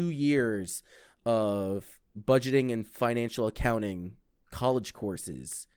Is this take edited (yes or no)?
no